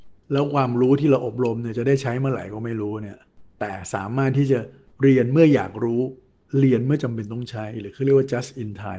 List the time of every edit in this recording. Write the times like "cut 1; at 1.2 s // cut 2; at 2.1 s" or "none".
none